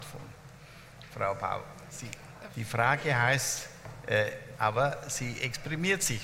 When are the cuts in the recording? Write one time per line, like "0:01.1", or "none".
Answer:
0:01.1
0:02.5
0:04.5